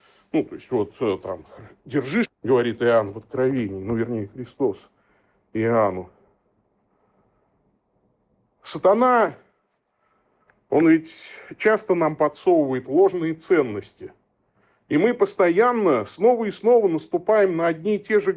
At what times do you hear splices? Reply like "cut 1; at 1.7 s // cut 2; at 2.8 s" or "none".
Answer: cut 1; at 2.2 s